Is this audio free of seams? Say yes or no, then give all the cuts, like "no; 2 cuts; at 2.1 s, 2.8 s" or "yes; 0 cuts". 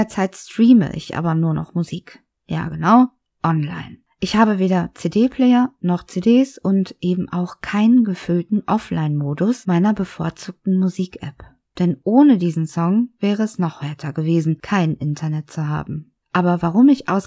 no; 2 cuts; at 11.7 s, 16.2 s